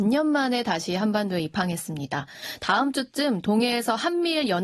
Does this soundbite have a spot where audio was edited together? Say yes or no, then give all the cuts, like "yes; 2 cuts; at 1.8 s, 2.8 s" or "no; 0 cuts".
no; 0 cuts